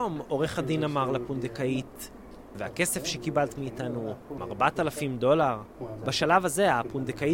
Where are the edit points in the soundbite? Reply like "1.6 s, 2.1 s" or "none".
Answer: 2.5 s, 4.4 s